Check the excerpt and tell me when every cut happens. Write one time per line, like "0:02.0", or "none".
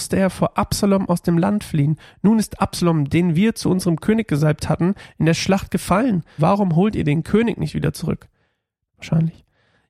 0:06.4
0:08.9